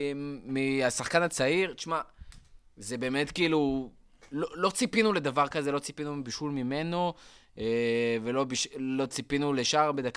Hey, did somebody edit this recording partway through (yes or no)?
no